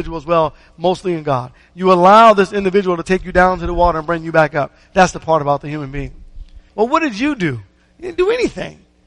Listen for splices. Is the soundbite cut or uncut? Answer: cut